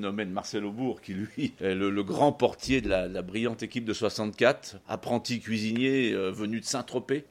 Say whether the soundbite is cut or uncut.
cut